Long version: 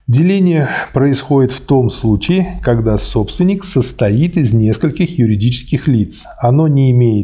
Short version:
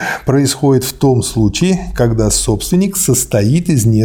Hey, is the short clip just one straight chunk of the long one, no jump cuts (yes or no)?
yes